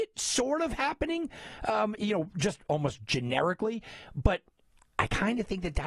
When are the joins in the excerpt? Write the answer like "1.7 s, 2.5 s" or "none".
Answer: none